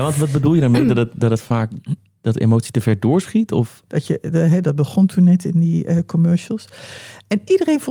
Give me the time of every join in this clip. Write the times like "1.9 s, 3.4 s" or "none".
3.9 s